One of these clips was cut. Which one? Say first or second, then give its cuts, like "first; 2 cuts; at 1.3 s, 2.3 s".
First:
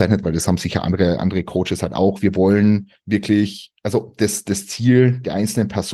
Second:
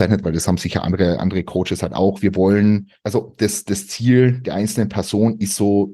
second; 1 cut; at 3.0 s